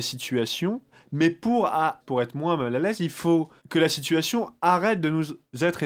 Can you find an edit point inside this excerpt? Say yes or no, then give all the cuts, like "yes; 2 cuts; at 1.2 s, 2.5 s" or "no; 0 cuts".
yes; 2 cuts; at 2.0 s, 3.6 s